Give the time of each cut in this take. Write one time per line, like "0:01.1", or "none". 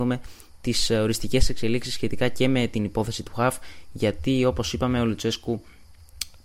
none